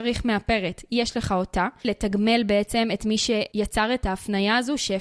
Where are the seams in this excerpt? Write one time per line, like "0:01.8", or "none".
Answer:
0:01.8